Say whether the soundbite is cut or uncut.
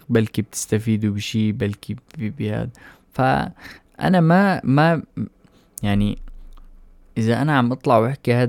uncut